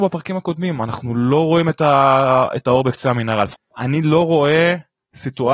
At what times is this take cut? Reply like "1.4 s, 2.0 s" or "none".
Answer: none